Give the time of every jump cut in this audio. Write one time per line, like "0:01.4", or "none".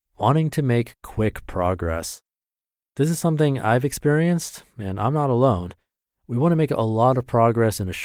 none